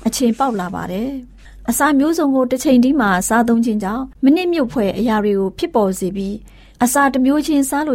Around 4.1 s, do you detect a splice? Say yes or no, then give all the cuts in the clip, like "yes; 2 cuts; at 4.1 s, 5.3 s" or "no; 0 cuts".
yes; 1 cut; at 4.1 s